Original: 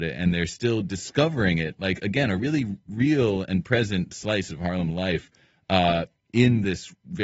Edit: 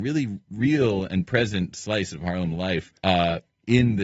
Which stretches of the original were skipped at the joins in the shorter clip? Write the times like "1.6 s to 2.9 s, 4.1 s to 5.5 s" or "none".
5.4 s to 5.6 s